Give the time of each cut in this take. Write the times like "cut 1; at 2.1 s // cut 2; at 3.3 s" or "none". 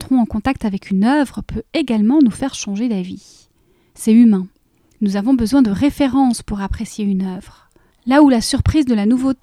cut 1; at 7.9 s